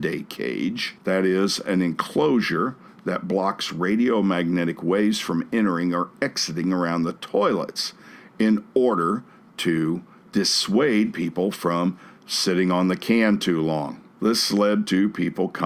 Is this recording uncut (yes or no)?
no